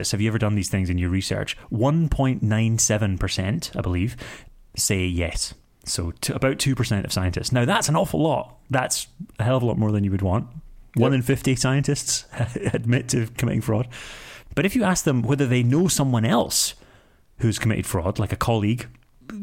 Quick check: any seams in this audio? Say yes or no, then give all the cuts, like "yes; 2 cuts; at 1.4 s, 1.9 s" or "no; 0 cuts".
no; 0 cuts